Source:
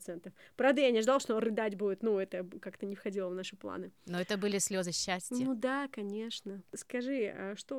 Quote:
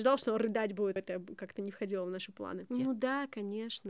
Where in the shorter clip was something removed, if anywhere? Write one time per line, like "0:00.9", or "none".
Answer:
0:01.0
0:02.7